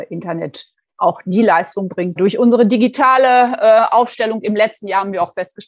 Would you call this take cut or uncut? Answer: cut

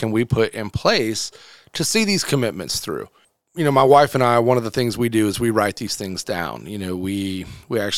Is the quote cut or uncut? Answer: uncut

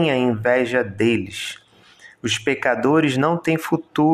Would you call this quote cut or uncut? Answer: uncut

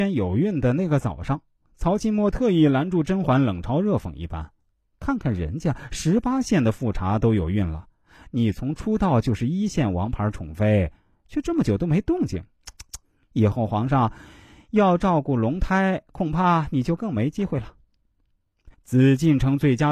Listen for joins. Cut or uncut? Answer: cut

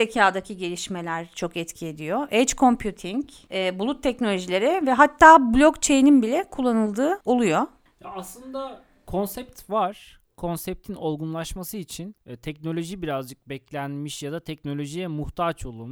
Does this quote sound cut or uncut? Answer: uncut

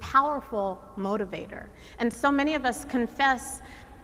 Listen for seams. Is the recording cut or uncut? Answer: uncut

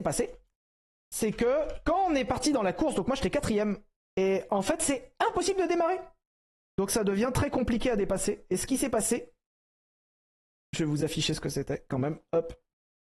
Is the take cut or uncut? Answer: cut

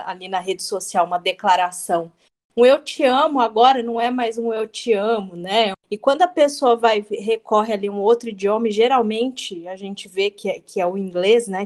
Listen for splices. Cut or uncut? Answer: cut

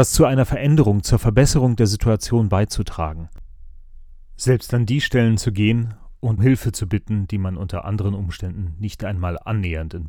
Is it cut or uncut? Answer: cut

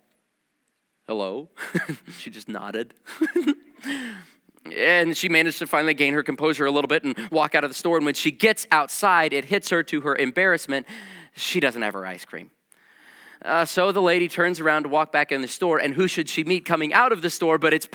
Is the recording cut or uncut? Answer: cut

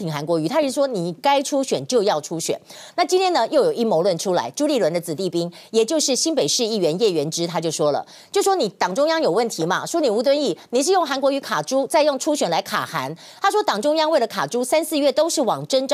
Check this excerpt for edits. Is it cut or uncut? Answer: uncut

